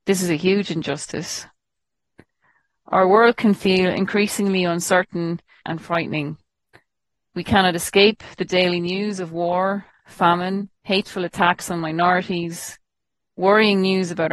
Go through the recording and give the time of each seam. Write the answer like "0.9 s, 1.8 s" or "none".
5.6 s, 10.8 s

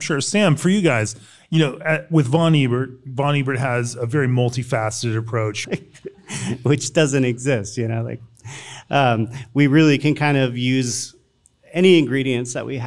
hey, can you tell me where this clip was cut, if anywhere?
5.6 s

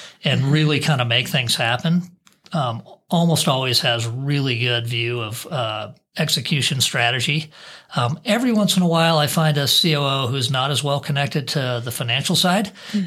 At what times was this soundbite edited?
none

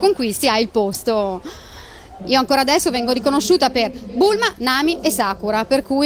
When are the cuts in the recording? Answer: 2.2 s

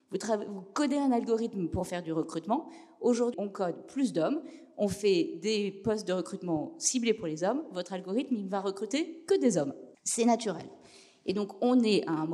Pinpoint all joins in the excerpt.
3.3 s, 9.9 s

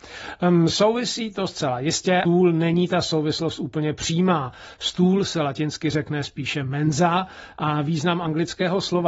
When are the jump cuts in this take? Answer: 2.3 s

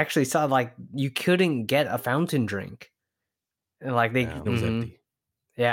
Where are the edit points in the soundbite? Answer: 4.5 s

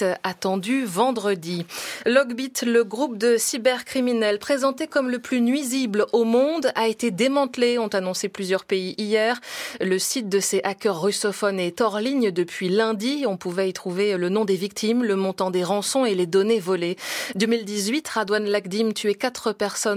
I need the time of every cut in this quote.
17.3 s

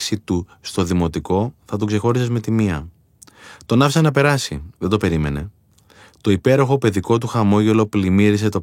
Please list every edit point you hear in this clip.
none

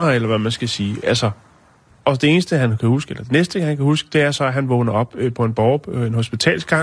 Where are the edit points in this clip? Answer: none

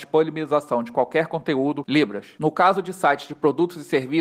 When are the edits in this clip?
1.8 s

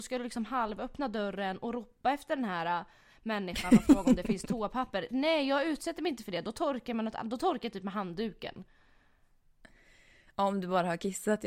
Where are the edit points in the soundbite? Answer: none

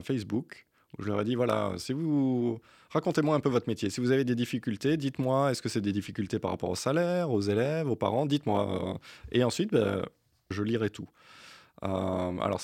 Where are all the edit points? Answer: 10.5 s

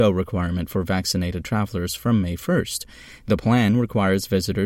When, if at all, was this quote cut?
none

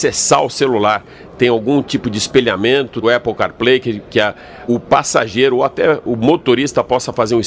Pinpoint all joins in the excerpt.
3.0 s, 4.7 s

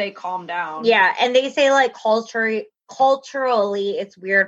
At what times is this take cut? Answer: none

